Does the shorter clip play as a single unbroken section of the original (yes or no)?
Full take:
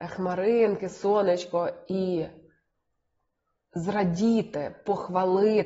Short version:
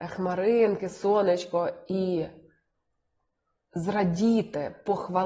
yes